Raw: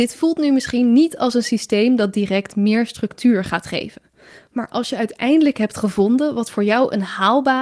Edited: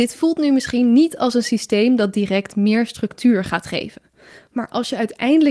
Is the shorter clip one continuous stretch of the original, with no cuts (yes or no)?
yes